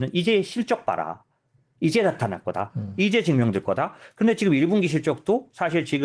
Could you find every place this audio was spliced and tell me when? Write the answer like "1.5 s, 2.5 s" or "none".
none